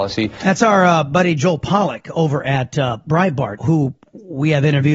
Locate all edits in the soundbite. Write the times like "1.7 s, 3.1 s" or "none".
3.6 s